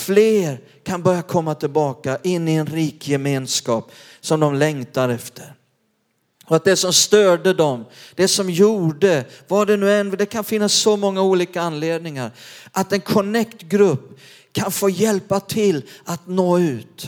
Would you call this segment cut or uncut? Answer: uncut